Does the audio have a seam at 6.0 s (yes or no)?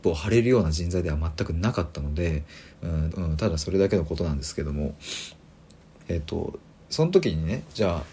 yes